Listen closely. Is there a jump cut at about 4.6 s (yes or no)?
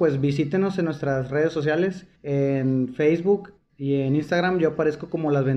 no